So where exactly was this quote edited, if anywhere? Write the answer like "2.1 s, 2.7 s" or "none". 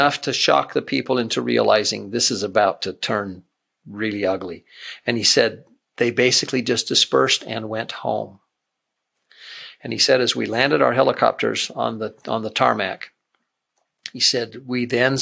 none